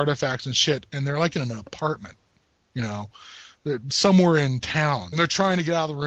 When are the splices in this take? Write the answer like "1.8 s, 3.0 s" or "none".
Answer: 5.1 s